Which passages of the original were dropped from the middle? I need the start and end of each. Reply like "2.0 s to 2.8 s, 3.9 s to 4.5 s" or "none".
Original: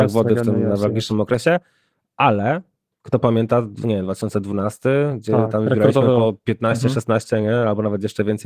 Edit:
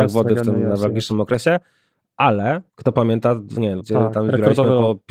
2.7 s to 2.9 s, 4.1 s to 5.2 s